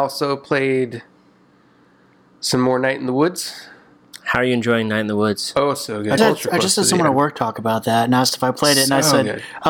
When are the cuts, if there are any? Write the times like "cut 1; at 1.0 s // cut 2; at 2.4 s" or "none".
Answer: cut 1; at 6.2 s